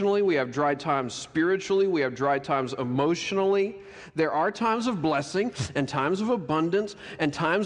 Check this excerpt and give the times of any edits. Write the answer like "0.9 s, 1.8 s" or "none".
none